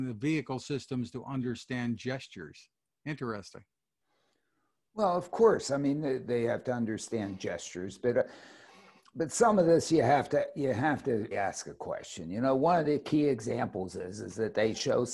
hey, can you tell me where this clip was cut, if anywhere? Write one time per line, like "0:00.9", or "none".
0:11.3